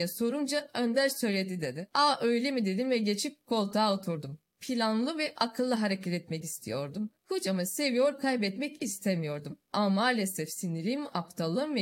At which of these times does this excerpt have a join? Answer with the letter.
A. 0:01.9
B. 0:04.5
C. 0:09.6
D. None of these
D